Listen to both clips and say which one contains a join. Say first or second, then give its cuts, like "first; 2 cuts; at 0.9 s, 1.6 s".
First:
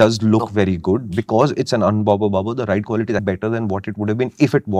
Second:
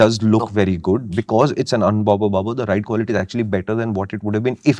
first; 1 cut; at 3.2 s